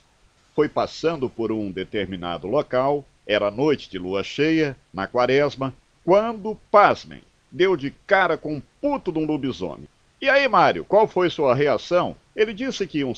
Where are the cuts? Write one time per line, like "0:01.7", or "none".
0:12.3